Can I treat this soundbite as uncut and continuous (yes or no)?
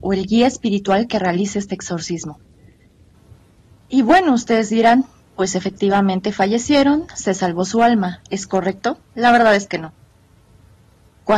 yes